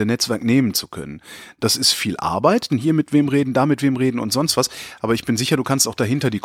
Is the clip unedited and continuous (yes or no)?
no